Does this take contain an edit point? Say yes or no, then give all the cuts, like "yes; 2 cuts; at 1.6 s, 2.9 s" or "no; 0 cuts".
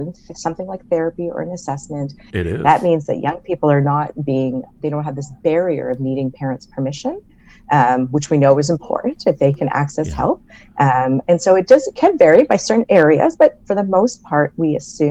yes; 2 cuts; at 2.3 s, 4.7 s